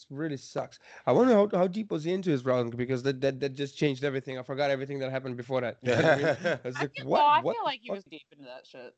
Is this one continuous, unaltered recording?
no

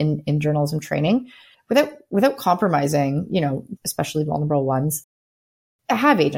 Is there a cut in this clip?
yes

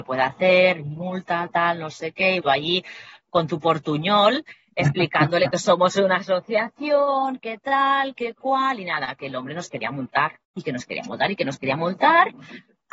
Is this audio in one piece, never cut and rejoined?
no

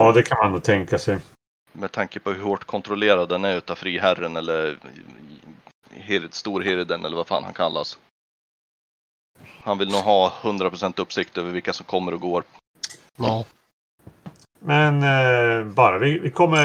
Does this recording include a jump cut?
no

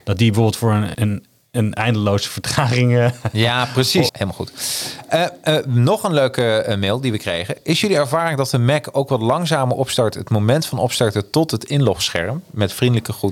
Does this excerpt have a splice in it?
yes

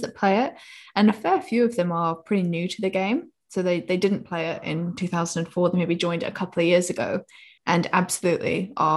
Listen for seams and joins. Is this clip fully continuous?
no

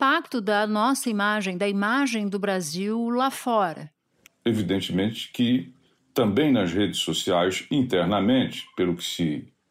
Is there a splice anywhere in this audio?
yes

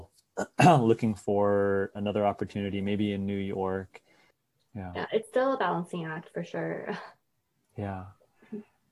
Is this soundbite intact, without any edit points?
no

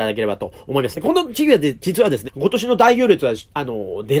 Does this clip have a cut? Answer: yes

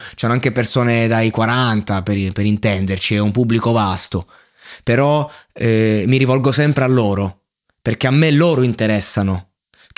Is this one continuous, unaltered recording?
yes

